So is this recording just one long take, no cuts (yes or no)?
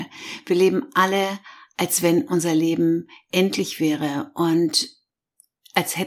yes